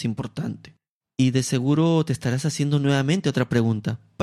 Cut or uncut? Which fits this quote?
uncut